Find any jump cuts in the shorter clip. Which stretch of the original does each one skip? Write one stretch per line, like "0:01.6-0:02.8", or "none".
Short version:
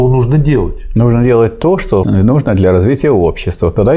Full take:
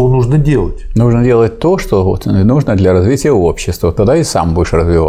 0:02.0-0:02.2